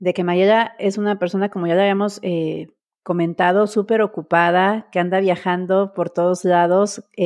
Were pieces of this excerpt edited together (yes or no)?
no